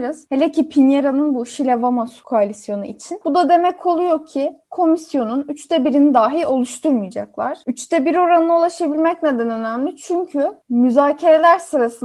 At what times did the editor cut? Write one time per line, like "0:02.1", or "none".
0:03.2